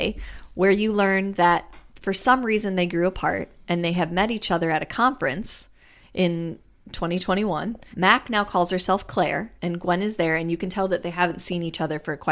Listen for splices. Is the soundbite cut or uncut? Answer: cut